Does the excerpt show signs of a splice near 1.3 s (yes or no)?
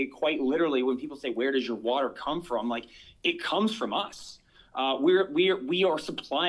no